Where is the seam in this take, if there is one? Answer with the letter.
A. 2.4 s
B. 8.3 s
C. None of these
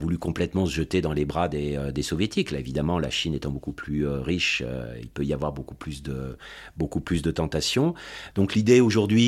B